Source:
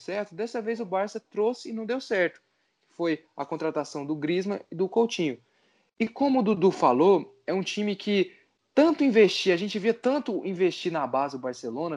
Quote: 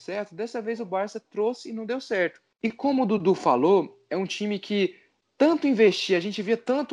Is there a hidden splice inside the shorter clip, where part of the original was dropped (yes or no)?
yes